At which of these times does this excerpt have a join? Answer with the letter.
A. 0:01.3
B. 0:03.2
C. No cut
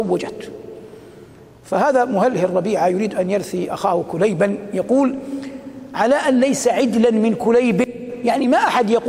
C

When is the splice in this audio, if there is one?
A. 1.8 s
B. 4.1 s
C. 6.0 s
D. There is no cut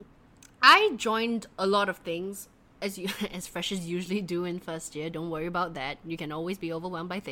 D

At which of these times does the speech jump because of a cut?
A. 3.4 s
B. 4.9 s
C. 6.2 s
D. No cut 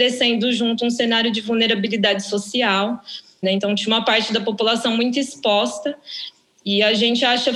A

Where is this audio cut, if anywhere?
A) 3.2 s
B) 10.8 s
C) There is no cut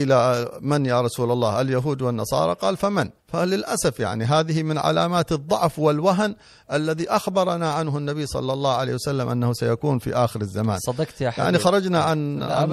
A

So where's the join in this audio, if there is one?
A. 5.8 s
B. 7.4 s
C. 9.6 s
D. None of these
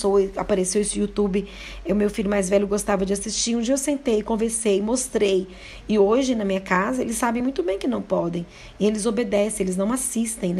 D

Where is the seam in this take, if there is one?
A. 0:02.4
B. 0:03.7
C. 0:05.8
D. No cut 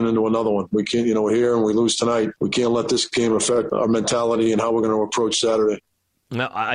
B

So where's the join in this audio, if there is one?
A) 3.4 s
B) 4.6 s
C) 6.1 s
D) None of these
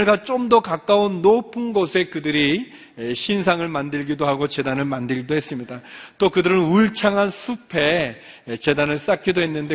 D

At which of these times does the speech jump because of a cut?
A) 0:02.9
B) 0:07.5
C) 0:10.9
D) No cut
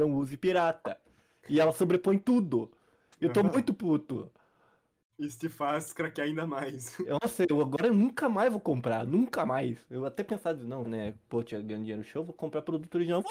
C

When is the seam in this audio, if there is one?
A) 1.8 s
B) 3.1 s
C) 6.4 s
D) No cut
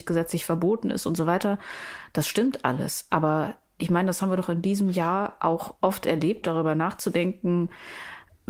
C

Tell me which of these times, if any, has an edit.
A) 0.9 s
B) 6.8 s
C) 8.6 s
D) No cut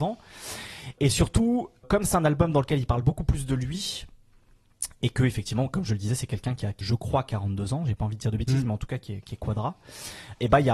B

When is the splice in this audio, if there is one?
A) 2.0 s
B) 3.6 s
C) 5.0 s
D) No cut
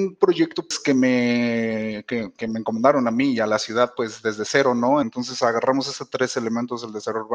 C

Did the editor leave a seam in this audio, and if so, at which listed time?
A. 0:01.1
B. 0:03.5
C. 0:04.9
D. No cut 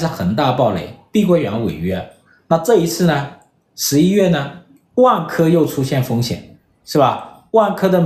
D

